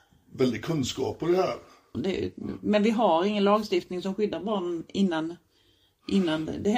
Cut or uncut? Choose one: cut